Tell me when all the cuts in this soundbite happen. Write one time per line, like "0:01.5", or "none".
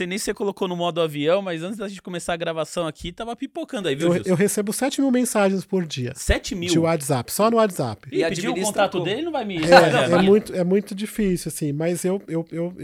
none